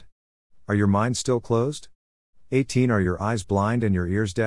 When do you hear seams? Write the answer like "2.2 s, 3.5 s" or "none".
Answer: none